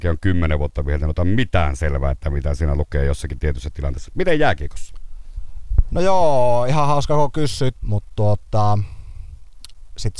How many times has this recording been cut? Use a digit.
1